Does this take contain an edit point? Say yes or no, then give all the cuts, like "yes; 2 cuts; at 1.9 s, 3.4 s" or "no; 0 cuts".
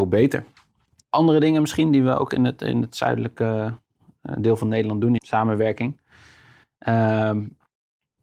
yes; 1 cut; at 5.2 s